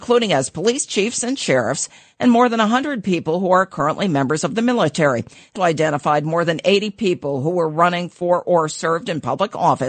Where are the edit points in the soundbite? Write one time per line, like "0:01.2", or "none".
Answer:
0:05.6